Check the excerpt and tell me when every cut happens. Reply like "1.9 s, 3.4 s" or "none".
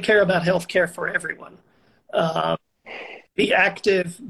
2.8 s